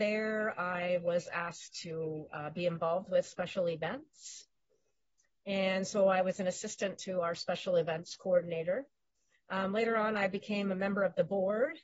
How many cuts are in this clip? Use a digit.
0